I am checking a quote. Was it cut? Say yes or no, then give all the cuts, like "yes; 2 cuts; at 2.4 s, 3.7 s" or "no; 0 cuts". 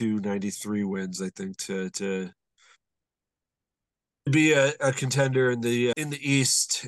yes; 2 cuts; at 4.3 s, 5.9 s